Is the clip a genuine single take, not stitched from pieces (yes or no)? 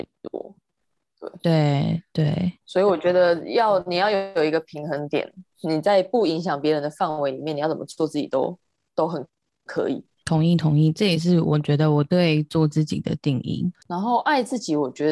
yes